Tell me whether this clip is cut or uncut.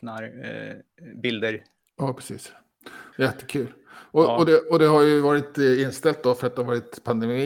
cut